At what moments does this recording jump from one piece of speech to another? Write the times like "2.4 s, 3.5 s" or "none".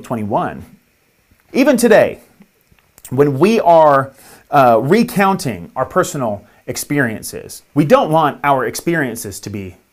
1.5 s, 7.7 s